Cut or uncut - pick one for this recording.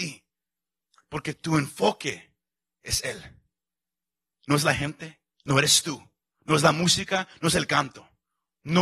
uncut